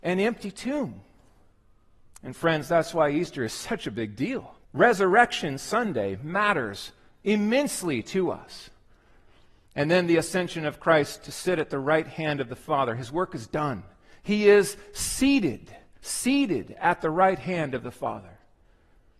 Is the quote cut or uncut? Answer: cut